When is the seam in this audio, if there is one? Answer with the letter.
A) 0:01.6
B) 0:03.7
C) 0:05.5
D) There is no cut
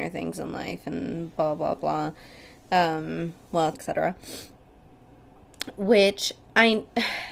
B